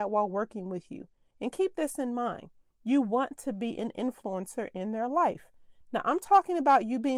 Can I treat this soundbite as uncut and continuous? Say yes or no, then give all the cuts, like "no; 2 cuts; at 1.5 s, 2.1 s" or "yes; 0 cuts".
yes; 0 cuts